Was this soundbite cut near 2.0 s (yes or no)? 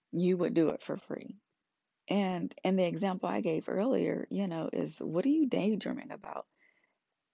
yes